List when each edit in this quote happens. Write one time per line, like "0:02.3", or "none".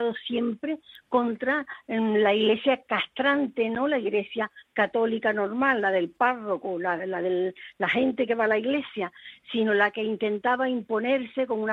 none